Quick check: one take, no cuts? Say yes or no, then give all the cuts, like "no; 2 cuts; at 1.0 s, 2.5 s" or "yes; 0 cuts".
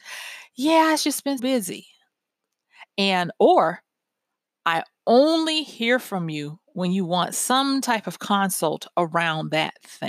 no; 1 cut; at 1.4 s